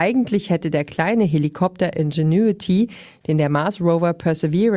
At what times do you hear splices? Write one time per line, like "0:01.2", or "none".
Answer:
none